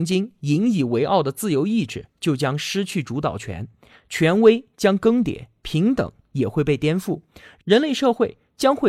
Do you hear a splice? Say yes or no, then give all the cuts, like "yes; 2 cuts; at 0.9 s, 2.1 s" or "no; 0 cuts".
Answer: no; 0 cuts